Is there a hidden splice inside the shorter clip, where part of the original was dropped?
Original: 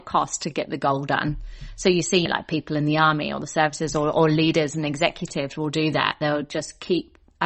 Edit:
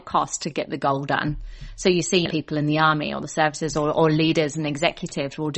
yes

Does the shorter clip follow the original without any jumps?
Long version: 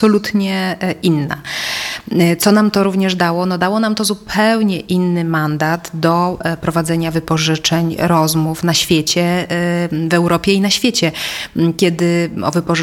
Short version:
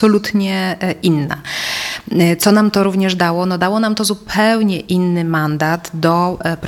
yes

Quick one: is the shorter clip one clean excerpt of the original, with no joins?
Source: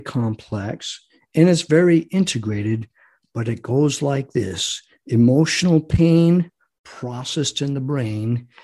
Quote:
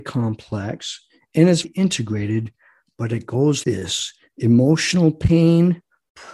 no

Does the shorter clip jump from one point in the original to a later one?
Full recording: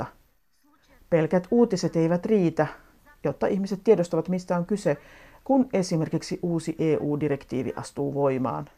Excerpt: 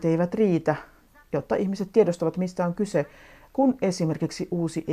no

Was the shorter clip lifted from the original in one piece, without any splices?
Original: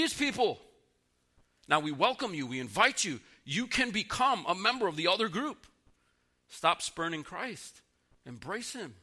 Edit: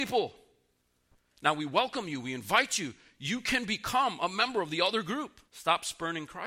no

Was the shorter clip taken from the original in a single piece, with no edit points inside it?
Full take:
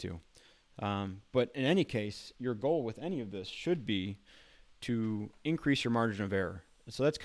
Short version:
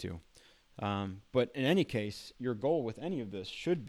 yes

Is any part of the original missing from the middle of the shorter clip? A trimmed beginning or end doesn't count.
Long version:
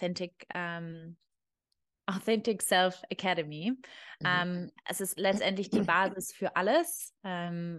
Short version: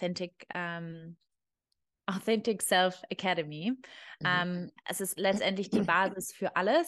no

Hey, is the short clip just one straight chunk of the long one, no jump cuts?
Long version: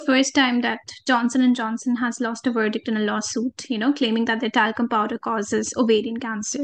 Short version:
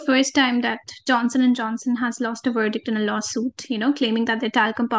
yes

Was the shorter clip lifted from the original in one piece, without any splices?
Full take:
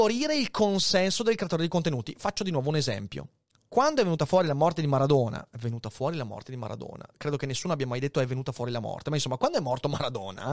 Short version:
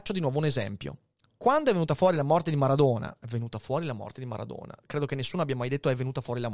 yes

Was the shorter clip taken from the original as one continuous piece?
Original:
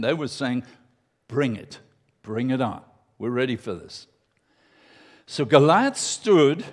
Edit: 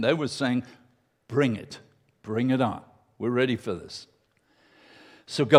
yes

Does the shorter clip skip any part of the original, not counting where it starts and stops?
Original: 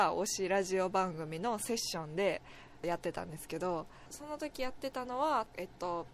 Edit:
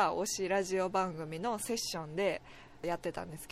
no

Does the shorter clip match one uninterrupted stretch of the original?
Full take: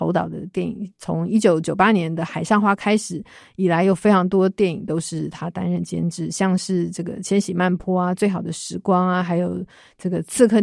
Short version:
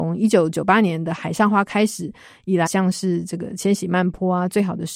no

